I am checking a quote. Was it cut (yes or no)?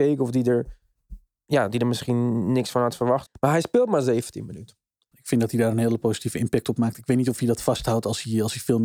yes